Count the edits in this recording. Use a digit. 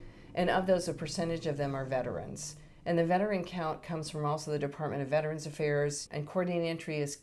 1